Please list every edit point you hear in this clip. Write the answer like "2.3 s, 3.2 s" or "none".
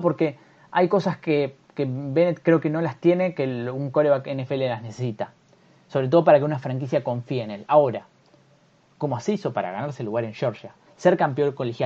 none